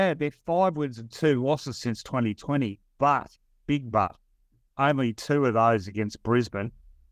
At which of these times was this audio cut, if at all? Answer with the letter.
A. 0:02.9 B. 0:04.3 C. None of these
C